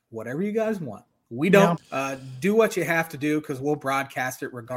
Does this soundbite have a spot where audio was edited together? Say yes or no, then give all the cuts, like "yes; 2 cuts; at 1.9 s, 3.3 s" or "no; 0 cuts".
yes; 1 cut; at 1.8 s